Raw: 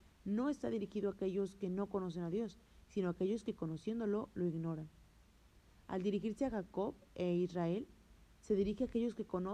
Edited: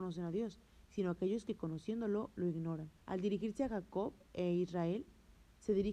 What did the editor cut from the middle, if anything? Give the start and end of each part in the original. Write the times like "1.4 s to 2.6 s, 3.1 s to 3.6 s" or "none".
5.0 s to 5.8 s